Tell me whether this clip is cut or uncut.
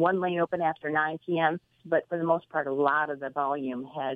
cut